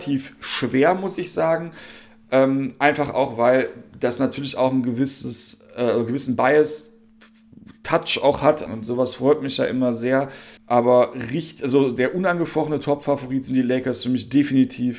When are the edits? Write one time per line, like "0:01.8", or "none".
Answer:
0:08.7
0:10.6